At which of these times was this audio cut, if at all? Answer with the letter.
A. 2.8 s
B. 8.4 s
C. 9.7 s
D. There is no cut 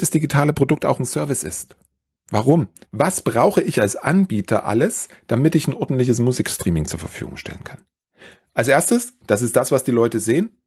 A